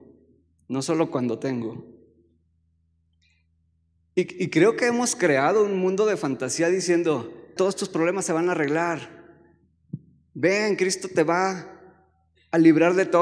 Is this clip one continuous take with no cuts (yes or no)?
no